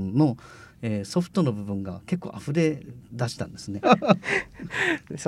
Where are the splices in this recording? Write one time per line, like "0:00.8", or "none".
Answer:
0:03.8